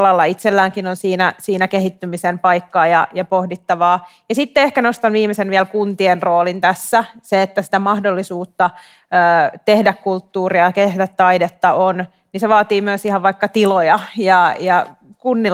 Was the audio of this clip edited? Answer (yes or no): no